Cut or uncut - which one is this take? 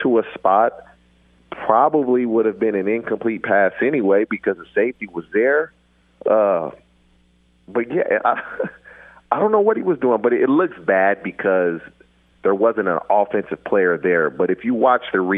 uncut